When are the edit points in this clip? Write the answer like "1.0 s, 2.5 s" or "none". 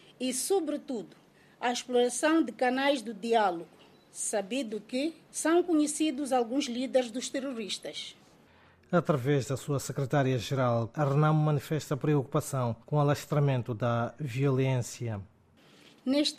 5.3 s, 10.9 s, 12.8 s

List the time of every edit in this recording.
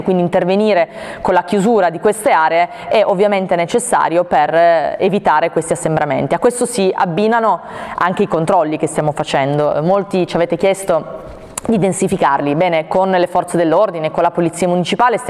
none

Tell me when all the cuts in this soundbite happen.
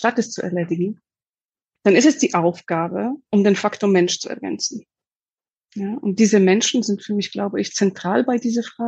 none

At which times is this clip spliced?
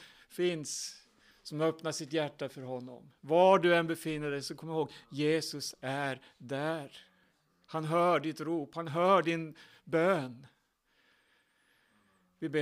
none

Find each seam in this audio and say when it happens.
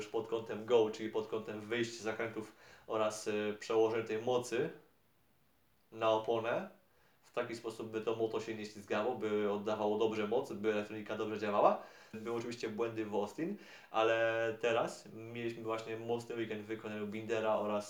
12.1 s

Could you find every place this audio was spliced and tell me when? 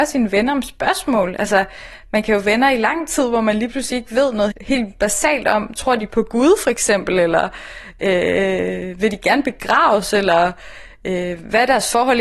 4.5 s

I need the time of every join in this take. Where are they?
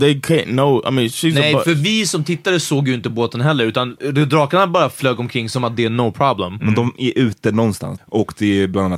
6.6 s, 8.0 s

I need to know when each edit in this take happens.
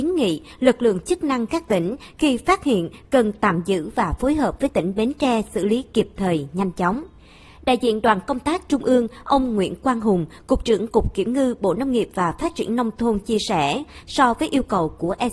none

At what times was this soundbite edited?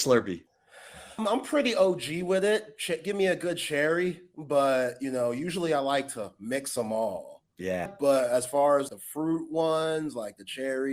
1.2 s, 7.9 s, 8.9 s

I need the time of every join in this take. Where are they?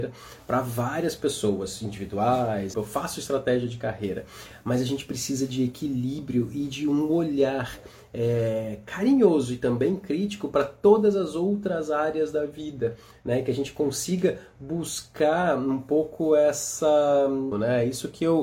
2.7 s, 17.5 s

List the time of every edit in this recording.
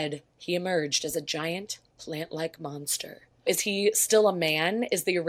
3.5 s

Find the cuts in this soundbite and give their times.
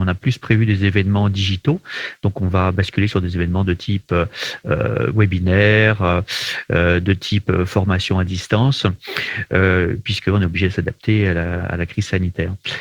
none

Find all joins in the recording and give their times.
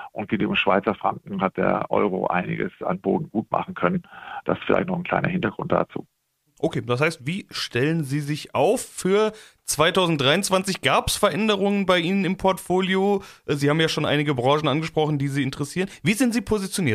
none

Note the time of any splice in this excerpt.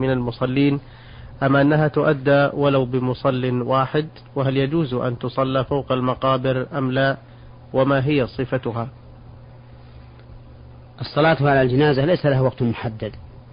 none

